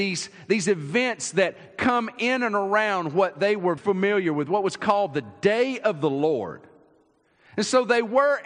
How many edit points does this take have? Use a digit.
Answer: 1